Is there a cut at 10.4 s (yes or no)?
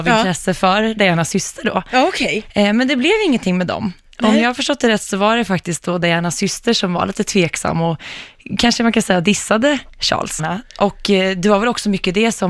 yes